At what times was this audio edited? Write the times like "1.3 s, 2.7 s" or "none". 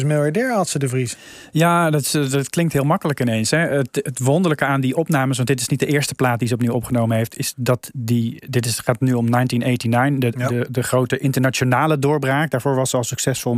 none